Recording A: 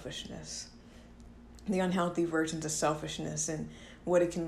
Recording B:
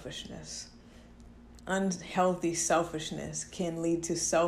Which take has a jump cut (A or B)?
B